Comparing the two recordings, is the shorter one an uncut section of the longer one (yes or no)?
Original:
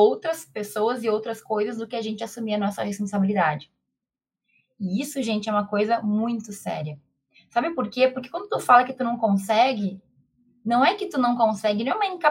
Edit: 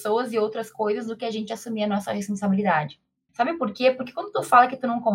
no